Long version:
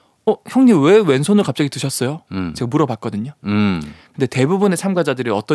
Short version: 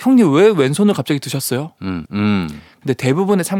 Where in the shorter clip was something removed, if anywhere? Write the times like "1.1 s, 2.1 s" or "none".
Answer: 2.0 s